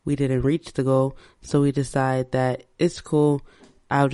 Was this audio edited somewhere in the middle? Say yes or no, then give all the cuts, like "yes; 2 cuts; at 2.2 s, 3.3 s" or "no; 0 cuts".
no; 0 cuts